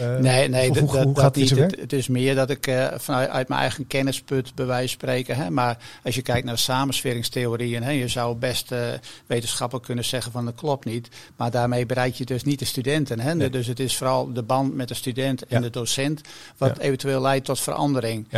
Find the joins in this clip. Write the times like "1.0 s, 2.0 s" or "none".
1.8 s